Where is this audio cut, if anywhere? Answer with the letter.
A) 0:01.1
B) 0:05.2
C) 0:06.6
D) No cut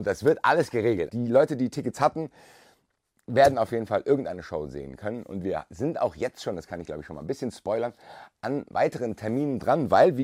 A